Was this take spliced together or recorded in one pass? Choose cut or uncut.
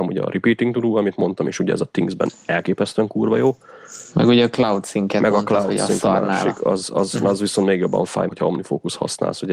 cut